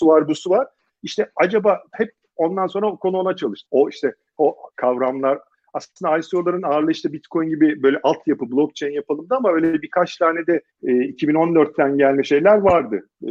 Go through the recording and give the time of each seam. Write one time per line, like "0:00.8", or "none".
0:03.7
0:10.7

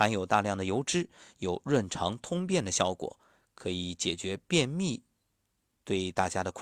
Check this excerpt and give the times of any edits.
none

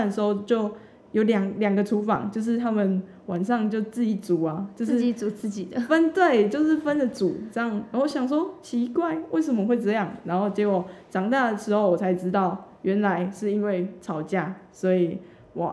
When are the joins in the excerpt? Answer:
none

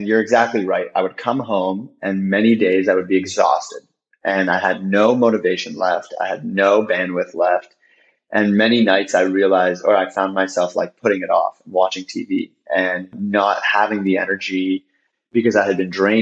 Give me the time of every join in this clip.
none

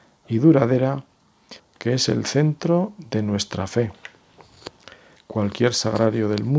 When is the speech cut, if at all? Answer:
0:01.6
0:05.2

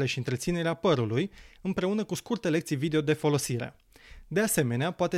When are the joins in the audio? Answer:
0:01.6

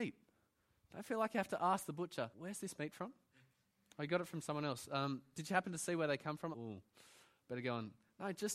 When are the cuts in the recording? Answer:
0:02.3
0:06.5

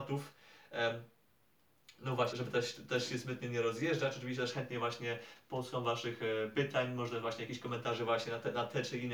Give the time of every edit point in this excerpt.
0:02.3

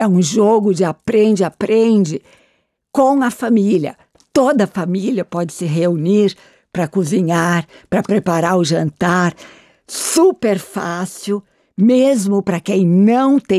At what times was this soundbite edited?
none

